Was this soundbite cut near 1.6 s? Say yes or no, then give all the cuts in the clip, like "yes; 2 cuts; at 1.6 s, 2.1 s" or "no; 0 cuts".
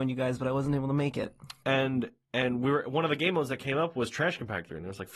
no; 0 cuts